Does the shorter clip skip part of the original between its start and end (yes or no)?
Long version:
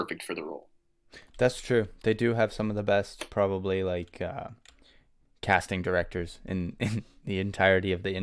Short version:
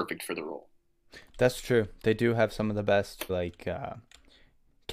yes